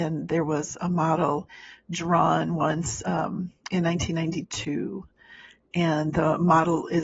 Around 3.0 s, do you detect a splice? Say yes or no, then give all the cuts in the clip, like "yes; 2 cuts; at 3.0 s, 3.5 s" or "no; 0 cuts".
no; 0 cuts